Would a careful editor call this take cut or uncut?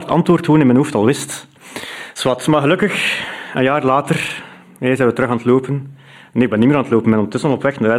cut